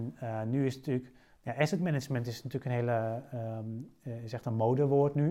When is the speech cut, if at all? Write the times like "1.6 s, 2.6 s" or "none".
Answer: none